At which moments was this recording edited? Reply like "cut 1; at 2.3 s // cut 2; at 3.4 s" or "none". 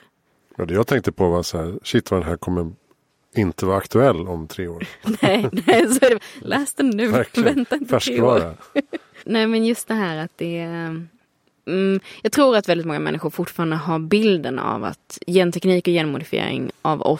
cut 1; at 6.4 s // cut 2; at 9.2 s

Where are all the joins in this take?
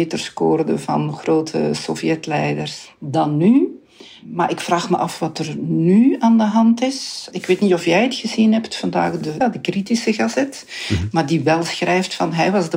cut 1; at 9.4 s

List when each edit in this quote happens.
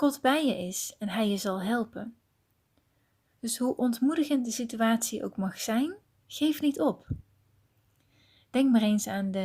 none

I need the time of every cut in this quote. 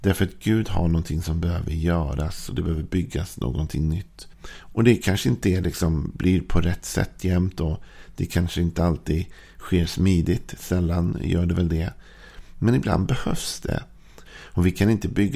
cut 1; at 4.3 s // cut 2; at 14.2 s

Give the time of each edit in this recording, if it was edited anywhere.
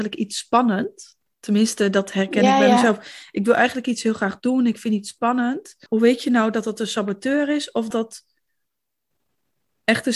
cut 1; at 5.9 s // cut 2; at 7.9 s

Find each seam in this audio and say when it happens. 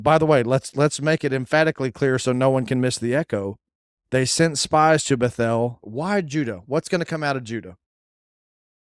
cut 1; at 5.8 s

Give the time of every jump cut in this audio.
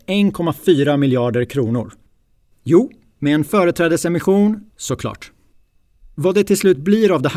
cut 1; at 2.5 s // cut 2; at 4.7 s

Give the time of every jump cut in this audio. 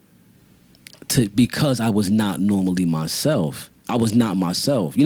none

